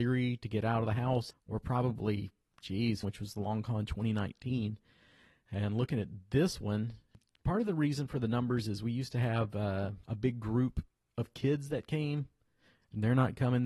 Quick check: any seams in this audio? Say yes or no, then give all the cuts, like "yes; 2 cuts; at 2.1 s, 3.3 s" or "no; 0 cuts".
yes; 2 cuts; at 1.3 s, 3.0 s